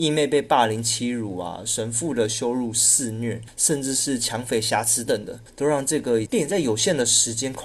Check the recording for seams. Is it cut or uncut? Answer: cut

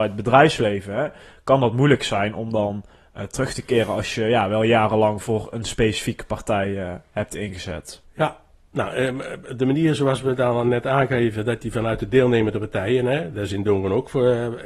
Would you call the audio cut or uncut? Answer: cut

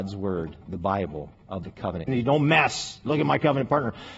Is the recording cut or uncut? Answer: cut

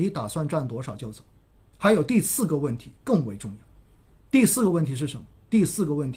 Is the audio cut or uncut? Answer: cut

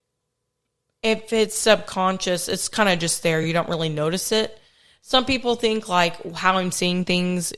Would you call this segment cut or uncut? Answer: uncut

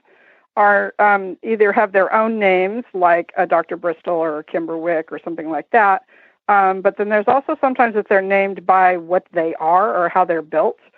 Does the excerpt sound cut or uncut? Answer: uncut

